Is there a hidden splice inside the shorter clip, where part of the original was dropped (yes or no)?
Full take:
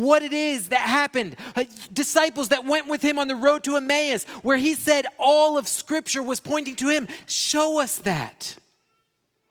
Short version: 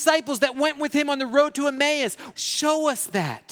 yes